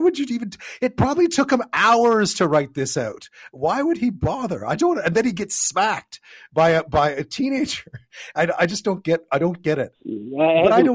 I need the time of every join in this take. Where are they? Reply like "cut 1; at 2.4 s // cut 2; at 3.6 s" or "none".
cut 1; at 4.8 s // cut 2; at 9.9 s